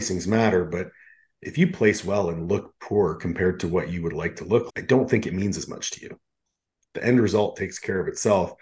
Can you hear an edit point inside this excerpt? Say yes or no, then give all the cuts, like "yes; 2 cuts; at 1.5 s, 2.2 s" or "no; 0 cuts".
yes; 2 cuts; at 4.7 s, 6.8 s